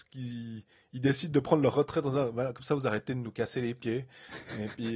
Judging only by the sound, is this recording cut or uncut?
uncut